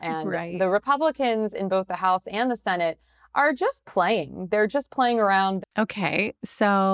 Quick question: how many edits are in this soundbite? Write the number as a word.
one